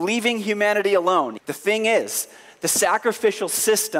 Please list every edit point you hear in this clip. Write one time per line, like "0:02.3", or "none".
0:01.4